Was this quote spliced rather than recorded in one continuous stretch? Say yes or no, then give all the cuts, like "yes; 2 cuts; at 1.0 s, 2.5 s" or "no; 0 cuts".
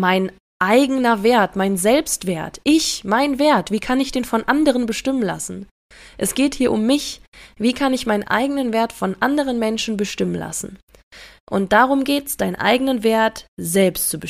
no; 0 cuts